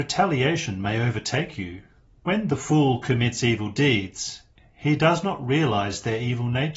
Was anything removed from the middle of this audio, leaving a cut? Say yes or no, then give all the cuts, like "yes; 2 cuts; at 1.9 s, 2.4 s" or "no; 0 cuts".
yes; 1 cut; at 2.2 s